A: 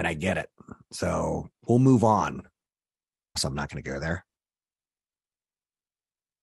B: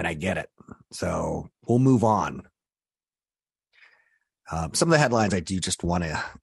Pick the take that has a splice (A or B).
A